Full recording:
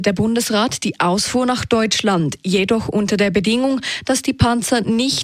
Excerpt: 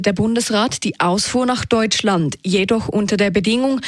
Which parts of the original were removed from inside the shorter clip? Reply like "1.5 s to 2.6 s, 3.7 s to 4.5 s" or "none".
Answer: none